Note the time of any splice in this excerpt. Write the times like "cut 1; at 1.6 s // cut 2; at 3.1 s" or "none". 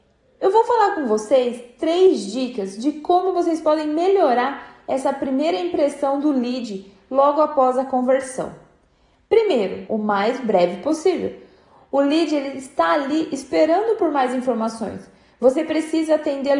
cut 1; at 9.9 s